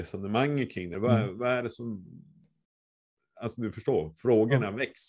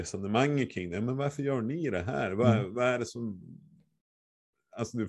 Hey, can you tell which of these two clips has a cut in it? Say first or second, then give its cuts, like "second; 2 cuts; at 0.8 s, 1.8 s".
first; 1 cut; at 0.9 s